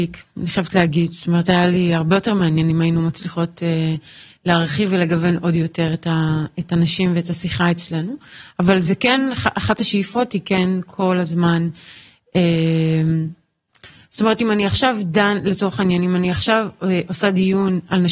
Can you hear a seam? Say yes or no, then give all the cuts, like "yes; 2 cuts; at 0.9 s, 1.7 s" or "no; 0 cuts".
no; 0 cuts